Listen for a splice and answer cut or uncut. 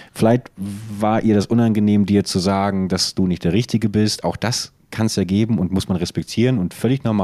uncut